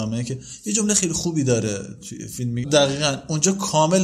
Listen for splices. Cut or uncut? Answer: cut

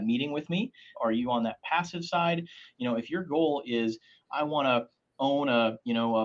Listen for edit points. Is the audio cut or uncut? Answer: cut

